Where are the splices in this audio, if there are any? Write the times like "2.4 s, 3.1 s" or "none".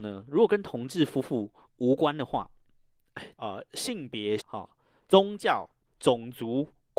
3.3 s, 4.4 s